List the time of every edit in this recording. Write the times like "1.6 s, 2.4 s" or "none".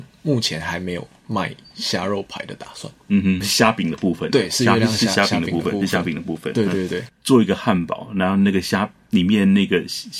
3.4 s, 7.1 s

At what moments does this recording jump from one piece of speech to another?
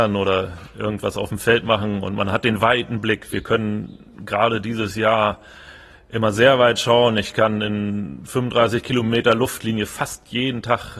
none

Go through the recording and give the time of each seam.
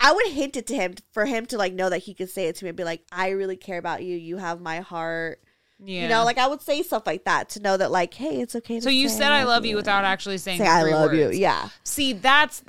none

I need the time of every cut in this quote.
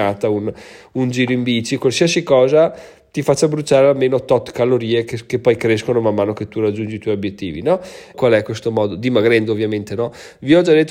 8.1 s

